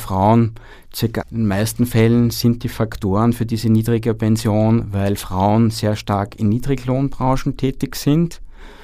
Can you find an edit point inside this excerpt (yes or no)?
yes